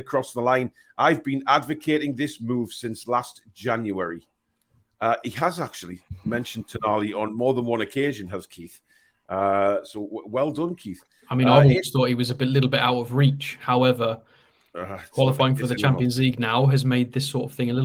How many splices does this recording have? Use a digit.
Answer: 0